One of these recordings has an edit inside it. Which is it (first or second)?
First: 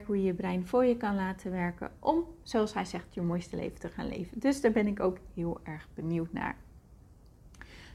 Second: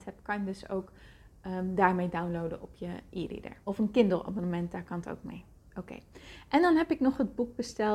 second